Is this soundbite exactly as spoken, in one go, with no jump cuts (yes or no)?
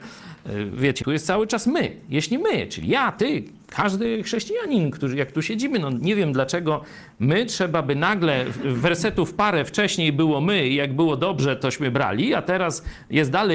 no